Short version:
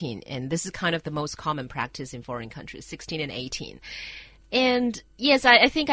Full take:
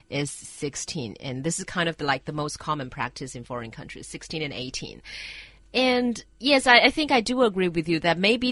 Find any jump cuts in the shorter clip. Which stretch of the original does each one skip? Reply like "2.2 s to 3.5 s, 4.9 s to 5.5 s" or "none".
2.0 s to 2.2 s